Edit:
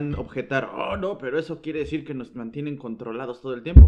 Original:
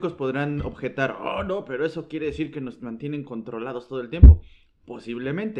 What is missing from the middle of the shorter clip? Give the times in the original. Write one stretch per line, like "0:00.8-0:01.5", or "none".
none